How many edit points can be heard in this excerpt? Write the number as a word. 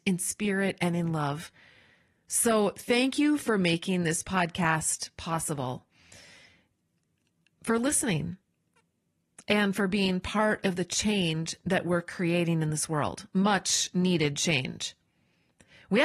zero